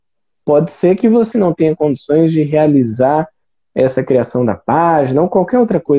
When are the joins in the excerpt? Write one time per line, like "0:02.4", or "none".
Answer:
0:01.3